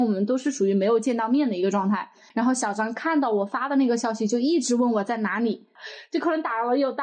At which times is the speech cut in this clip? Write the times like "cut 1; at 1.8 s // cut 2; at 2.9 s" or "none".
cut 1; at 2.3 s

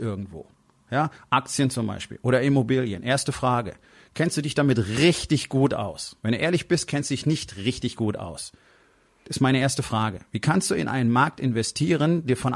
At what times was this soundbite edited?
cut 1; at 6.2 s // cut 2; at 9.2 s

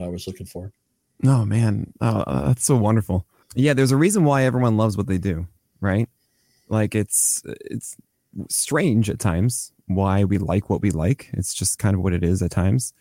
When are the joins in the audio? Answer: cut 1; at 3.4 s

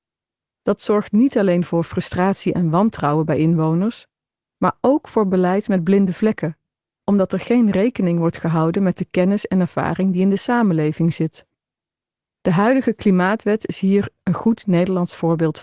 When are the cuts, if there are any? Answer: none

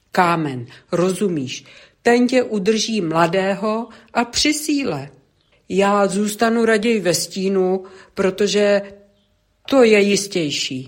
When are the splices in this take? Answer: cut 1; at 5.5 s

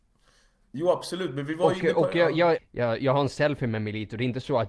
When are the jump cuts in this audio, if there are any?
cut 1; at 2.6 s

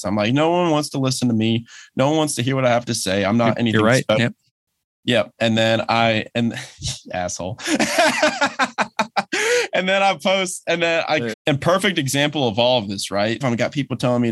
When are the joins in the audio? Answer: cut 1; at 11.3 s // cut 2; at 13.4 s

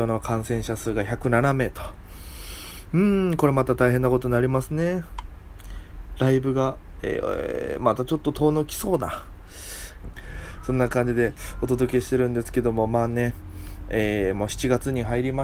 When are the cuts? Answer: cut 1; at 10.0 s

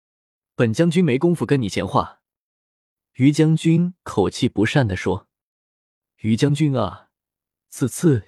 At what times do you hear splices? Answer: none

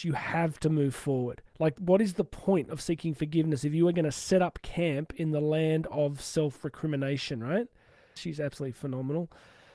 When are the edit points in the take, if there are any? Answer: cut 1; at 1.5 s // cut 2; at 8.2 s

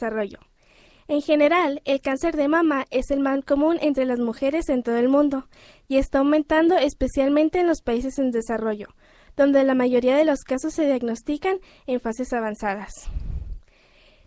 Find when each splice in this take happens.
none

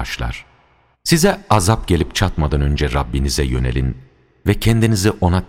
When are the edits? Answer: cut 1; at 0.9 s

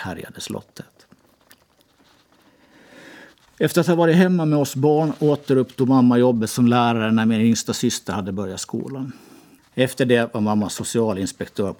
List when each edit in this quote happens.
none

